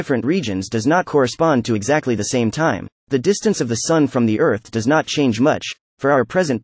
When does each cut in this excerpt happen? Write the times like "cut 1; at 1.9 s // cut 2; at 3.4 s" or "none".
cut 1; at 3.0 s